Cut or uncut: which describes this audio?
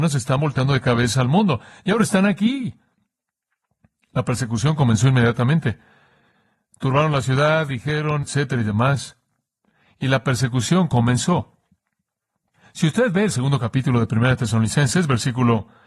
cut